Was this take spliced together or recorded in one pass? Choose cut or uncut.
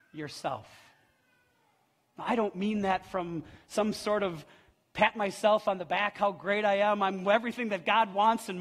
uncut